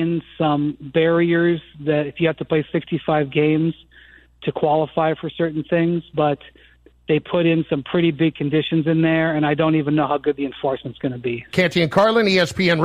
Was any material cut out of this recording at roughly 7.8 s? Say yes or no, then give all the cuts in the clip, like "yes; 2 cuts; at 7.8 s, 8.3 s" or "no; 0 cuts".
no; 1 cut; at 11.5 s